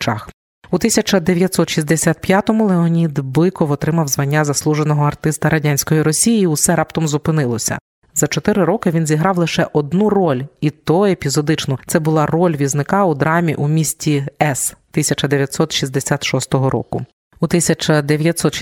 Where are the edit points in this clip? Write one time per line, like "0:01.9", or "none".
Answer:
none